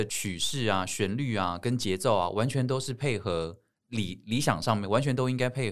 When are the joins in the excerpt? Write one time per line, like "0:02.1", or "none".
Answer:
none